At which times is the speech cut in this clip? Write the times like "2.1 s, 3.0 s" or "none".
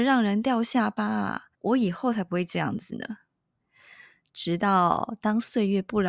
1.5 s